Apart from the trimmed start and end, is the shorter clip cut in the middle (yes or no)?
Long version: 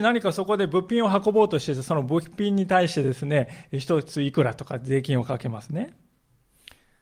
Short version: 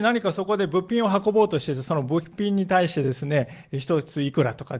no